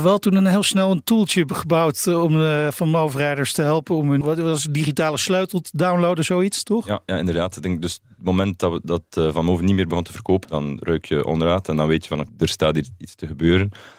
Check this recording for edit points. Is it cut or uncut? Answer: cut